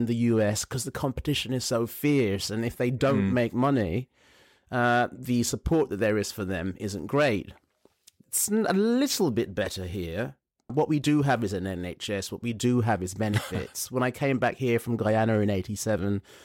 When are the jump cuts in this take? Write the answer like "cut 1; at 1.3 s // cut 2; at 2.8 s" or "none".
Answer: cut 1; at 10.7 s